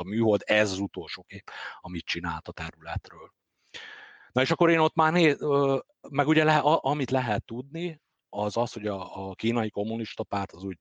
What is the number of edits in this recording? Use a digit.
0